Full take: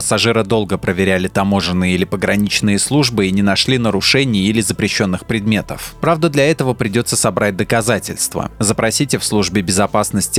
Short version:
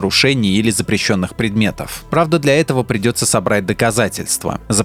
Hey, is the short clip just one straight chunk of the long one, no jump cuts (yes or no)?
yes